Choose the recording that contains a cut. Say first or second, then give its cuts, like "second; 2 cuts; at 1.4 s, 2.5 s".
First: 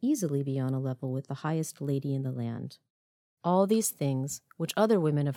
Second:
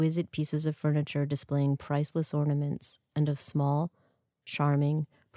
first; 1 cut; at 3.4 s